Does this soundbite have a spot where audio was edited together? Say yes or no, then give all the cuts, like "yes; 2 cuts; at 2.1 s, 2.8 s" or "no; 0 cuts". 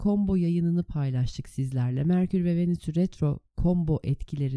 no; 0 cuts